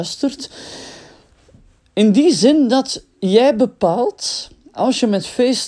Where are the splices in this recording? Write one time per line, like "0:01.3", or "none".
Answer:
none